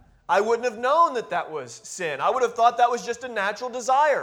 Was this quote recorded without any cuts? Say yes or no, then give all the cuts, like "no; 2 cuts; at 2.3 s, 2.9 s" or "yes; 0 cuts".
yes; 0 cuts